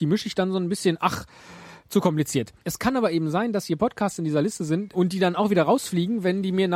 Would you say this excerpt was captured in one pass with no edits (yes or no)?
no